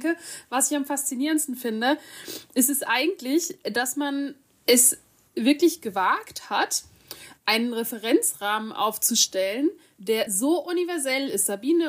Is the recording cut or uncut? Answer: uncut